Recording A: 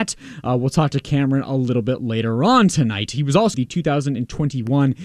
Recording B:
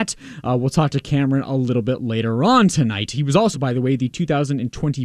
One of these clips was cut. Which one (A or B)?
A